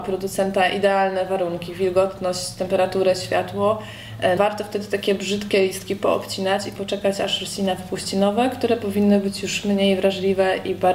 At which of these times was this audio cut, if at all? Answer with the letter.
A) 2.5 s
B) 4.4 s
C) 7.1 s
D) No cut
B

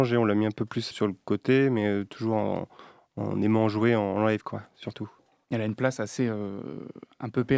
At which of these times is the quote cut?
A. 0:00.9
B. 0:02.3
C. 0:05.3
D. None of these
A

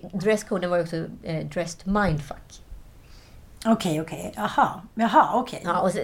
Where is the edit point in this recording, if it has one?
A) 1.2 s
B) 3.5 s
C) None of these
C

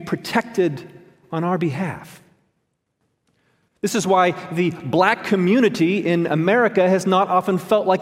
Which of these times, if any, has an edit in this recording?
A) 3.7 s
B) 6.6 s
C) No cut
A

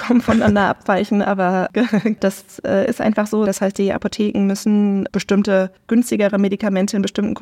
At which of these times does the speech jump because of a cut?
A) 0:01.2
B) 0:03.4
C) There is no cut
B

